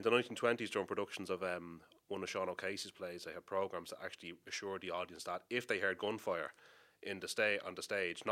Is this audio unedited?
yes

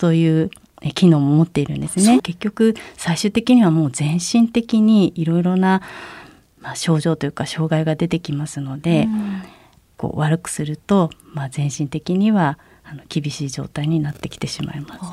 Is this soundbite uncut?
no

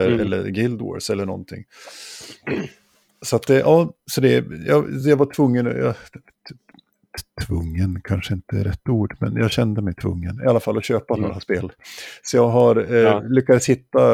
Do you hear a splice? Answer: no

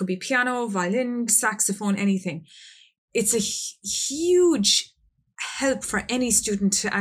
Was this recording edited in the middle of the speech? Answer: yes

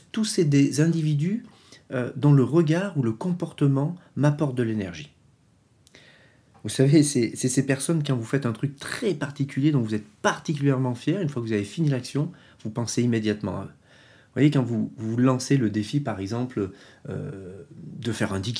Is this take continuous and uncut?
yes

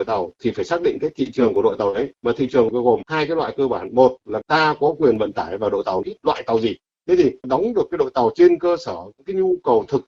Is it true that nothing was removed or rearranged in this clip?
no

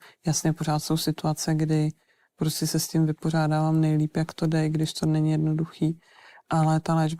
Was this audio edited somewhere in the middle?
no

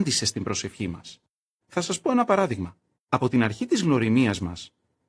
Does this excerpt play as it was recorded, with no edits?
no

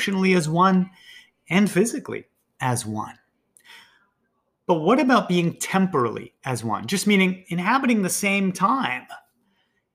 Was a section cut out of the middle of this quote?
no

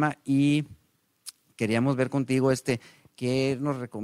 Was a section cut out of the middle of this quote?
yes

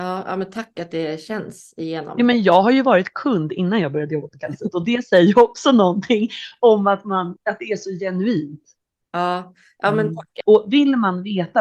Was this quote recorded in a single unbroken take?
no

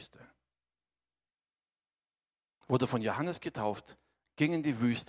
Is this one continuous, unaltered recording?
yes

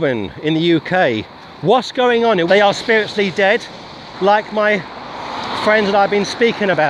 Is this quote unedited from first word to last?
no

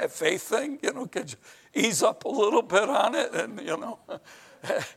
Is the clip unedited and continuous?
yes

